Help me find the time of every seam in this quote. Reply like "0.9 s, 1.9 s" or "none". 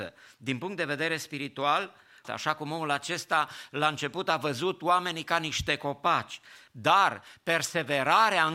2.2 s, 6.7 s